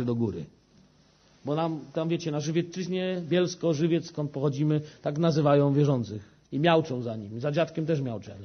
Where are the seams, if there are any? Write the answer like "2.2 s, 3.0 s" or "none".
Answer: 6.5 s